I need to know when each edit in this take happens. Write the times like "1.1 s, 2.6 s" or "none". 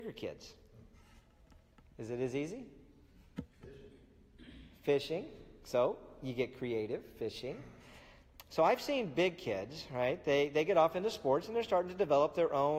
none